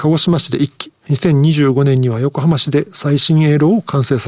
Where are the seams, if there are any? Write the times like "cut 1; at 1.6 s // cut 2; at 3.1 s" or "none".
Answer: cut 1; at 1.0 s

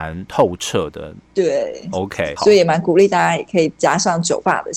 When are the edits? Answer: cut 1; at 1.2 s // cut 2; at 2.4 s

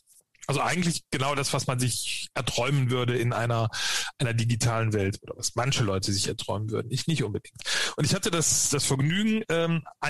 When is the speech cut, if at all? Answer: none

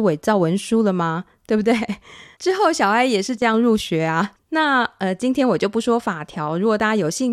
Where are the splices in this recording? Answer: cut 1; at 2.4 s

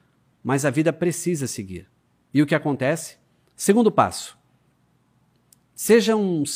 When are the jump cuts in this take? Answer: cut 1; at 3.5 s

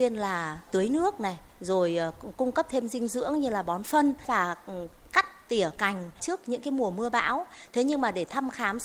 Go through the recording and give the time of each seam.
cut 1; at 6.2 s

